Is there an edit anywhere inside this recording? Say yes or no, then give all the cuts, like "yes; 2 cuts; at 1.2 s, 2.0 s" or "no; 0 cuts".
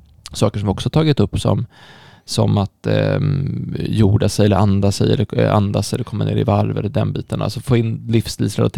no; 0 cuts